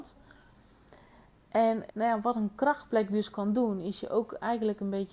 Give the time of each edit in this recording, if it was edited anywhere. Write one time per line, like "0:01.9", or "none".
0:01.9